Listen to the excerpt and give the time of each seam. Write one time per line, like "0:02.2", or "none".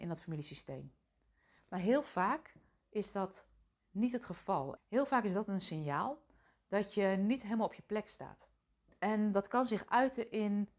0:01.6
0:04.8